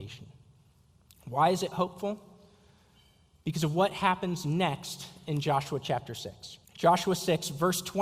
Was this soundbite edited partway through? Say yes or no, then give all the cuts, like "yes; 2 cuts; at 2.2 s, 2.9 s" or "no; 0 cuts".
yes; 1 cut; at 6.6 s